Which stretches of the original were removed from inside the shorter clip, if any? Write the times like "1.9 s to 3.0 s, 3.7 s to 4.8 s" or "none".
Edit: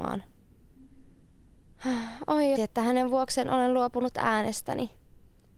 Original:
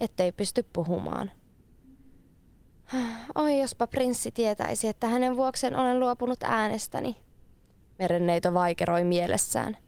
3.6 s to 4.8 s